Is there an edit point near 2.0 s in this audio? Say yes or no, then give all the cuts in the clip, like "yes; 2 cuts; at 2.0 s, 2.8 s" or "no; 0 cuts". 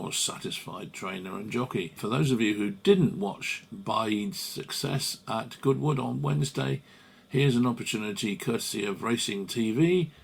yes; 1 cut; at 2.0 s